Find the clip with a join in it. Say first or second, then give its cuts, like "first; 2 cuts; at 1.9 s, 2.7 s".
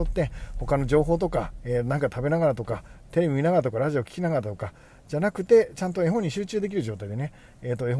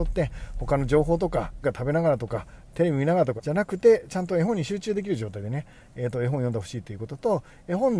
second; 2 cuts; at 1.6 s, 3.4 s